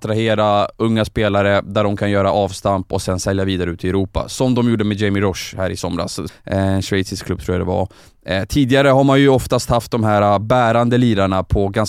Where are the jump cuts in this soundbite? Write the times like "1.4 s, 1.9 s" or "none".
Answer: 6.3 s